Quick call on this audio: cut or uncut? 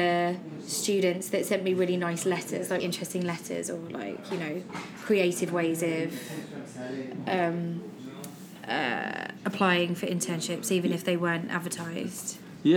cut